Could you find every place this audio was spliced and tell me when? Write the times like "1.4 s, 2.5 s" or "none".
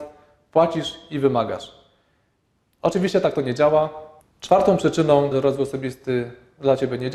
4.2 s, 5.3 s